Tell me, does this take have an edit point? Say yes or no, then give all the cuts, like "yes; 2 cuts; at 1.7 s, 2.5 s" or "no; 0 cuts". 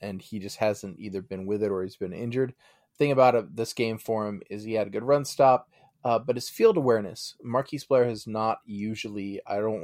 no; 0 cuts